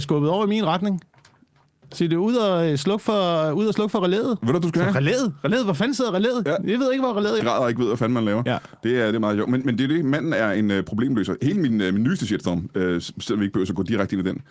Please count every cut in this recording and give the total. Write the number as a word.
one